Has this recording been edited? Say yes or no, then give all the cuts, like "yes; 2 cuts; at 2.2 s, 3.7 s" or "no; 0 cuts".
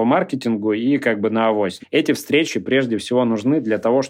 yes; 1 cut; at 1.8 s